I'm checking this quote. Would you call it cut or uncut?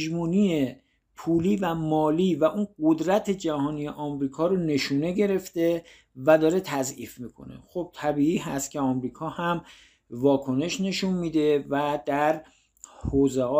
uncut